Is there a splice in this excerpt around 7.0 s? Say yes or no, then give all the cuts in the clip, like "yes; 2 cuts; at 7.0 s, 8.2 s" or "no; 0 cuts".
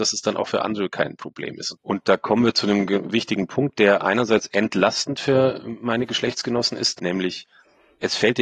yes; 2 cuts; at 1.7 s, 7.0 s